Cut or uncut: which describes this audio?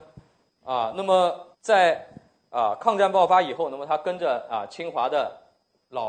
cut